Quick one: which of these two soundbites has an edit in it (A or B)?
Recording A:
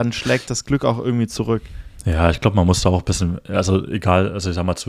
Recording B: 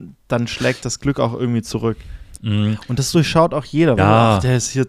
B